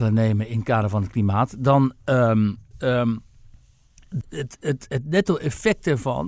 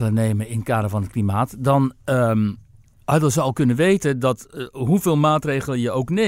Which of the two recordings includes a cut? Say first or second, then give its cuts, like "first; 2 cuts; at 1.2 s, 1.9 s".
first; 2 cuts; at 2.7 s, 4.2 s